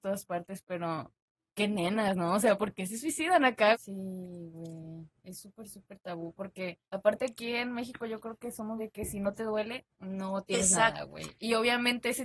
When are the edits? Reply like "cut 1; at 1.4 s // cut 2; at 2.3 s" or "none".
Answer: cut 1; at 3.7 s // cut 2; at 6.8 s // cut 3; at 8.8 s